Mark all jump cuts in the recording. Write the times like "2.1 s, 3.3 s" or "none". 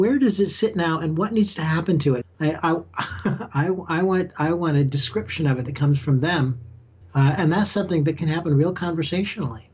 2.2 s, 7.0 s